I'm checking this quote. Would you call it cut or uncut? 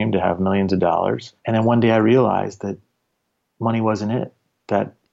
cut